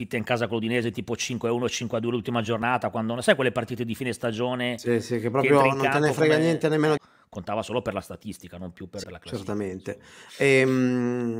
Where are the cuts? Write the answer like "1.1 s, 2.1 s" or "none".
7.0 s, 9.0 s